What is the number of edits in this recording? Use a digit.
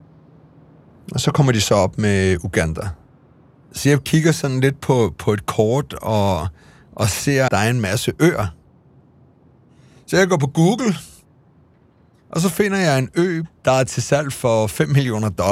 1